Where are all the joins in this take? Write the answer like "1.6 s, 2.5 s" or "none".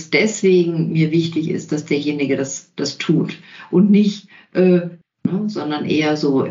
5.0 s